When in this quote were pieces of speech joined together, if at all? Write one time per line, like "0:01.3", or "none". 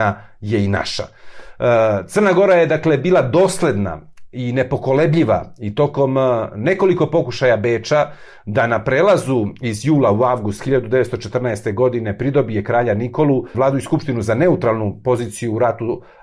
0:13.5